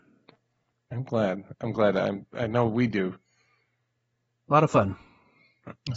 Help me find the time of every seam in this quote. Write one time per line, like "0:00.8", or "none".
none